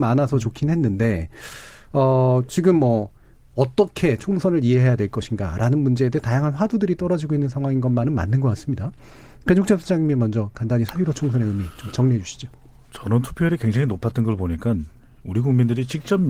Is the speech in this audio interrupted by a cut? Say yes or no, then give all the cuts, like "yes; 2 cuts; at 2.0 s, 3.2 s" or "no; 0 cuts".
no; 0 cuts